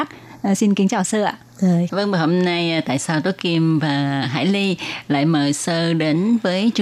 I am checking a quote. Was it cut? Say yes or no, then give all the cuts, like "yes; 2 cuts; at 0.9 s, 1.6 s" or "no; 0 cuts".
yes; 1 cut; at 1.9 s